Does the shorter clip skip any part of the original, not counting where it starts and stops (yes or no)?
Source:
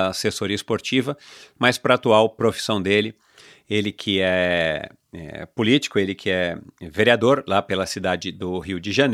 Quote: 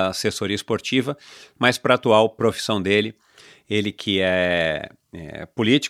no